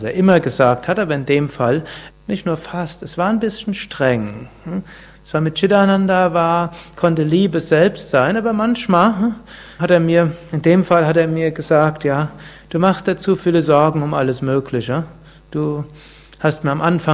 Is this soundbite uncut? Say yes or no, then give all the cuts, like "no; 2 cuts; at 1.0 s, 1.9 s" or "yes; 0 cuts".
no; 2 cuts; at 2.1 s, 9.8 s